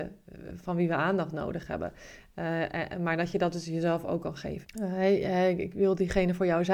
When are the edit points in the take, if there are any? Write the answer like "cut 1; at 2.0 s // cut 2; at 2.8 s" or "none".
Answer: cut 1; at 4.6 s